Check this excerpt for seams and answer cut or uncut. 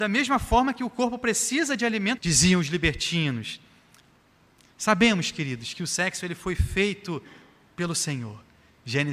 cut